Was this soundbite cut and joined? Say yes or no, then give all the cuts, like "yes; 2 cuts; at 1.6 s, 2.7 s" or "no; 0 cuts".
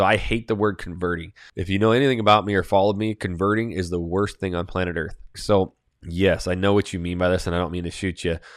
yes; 1 cut; at 5.3 s